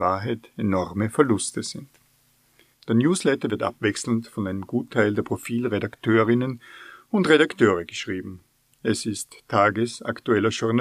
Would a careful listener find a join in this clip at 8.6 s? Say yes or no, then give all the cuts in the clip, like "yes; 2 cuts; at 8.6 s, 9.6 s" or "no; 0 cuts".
no; 1 cut; at 2.7 s